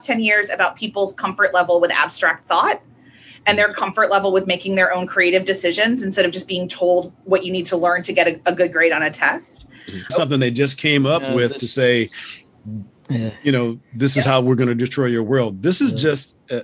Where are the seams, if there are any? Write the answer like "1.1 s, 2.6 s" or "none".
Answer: 10.1 s